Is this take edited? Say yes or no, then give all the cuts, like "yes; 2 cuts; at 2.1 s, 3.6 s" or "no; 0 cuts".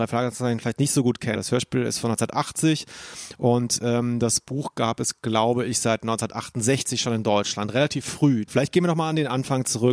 yes; 2 cuts; at 1.3 s, 8.5 s